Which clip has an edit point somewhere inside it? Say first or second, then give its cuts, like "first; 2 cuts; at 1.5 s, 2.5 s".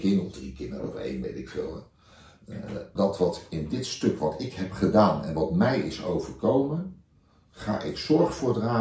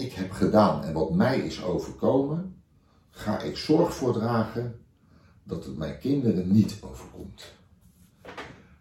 first; 1 cut; at 3.0 s